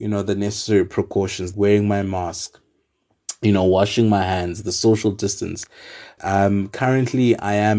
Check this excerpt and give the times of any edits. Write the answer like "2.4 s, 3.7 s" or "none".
1.5 s, 6.2 s